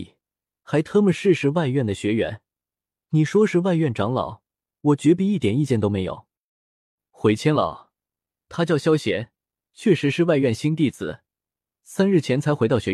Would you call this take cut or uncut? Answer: uncut